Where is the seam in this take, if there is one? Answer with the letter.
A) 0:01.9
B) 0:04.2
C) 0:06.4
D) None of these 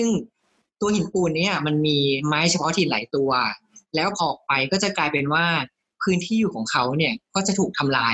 B